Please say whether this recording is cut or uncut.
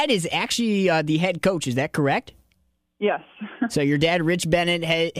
uncut